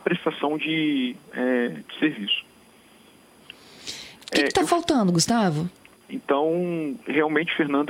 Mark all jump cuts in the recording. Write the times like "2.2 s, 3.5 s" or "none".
4.2 s, 5.9 s